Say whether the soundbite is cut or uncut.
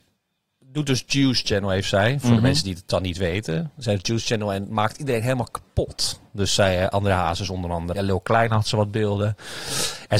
cut